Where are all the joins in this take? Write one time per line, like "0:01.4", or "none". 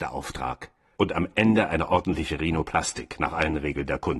0:01.0